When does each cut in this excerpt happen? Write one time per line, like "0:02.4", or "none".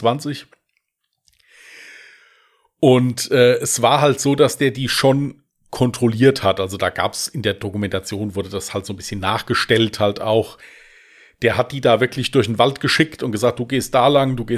none